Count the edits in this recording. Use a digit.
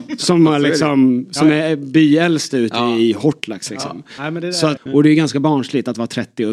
1